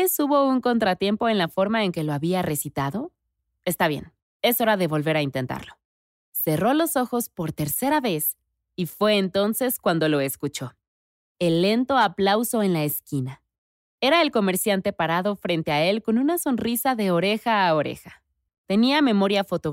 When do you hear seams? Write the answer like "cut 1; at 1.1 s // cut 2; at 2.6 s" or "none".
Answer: cut 1; at 18.5 s